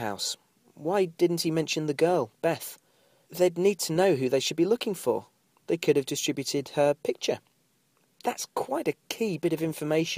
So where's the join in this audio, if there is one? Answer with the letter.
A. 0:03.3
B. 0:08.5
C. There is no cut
A